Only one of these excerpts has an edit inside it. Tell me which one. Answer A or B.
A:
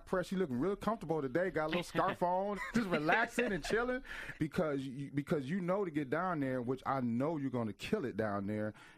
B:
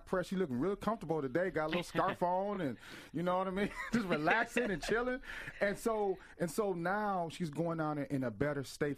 A